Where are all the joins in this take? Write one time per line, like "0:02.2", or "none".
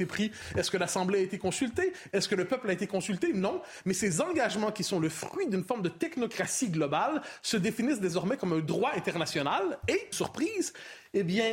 0:10.1